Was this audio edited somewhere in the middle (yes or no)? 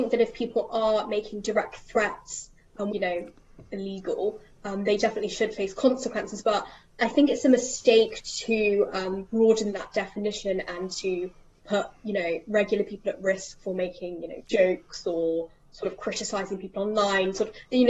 yes